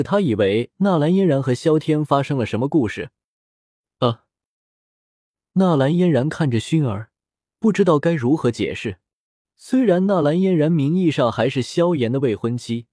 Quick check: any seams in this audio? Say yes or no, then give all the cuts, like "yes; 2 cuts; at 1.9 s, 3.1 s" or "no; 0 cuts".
yes; 2 cuts; at 7.5 s, 9.4 s